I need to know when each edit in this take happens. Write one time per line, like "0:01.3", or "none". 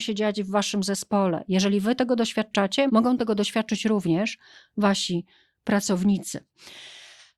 none